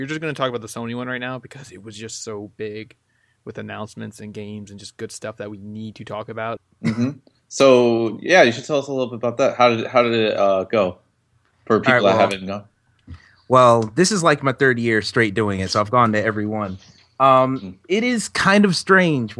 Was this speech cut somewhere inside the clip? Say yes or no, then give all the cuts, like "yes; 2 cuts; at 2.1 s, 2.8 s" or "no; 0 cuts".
yes; 1 cut; at 6.6 s